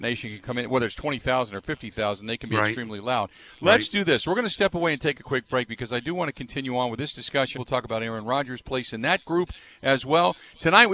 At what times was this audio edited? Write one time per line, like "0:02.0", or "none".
0:07.5